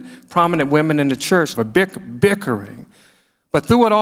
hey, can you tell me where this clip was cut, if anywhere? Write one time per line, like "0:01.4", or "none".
0:01.6